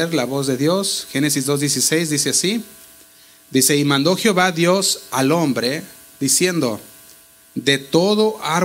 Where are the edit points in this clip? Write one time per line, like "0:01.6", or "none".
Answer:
none